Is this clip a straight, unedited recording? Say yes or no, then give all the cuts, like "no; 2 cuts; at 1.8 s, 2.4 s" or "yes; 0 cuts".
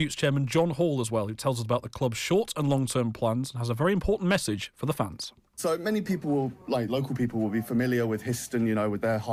yes; 0 cuts